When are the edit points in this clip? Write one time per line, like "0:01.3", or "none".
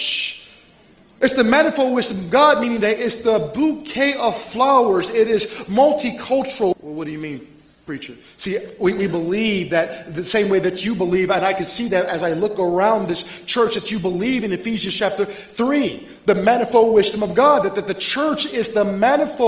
0:06.7